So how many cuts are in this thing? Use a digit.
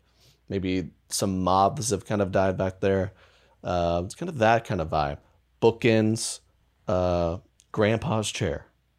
1